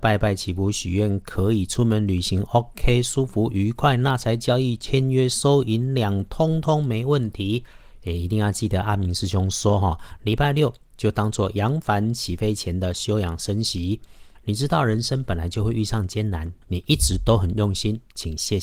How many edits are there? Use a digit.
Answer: 2